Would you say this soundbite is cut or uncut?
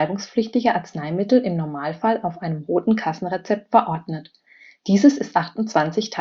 uncut